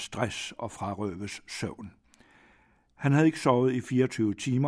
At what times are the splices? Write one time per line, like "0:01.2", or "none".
none